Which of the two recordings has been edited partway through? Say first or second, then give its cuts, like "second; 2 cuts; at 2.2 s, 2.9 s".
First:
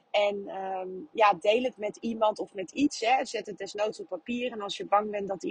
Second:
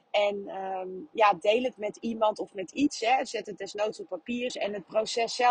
second; 1 cut; at 4.5 s